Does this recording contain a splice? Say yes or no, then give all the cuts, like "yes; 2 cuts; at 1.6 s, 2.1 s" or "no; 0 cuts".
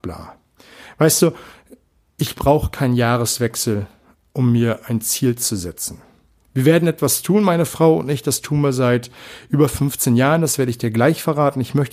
no; 0 cuts